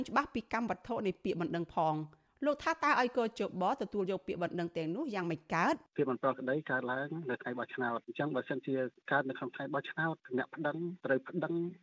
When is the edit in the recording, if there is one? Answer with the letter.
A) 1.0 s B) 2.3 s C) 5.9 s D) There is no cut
C